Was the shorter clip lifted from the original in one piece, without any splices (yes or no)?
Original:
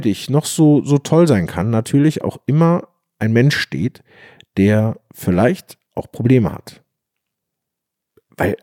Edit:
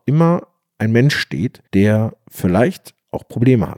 no